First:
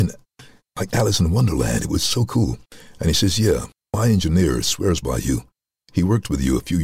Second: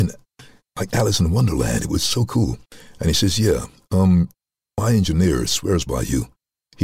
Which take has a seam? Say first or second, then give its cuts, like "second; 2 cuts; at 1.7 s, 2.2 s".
first; 1 cut; at 3.7 s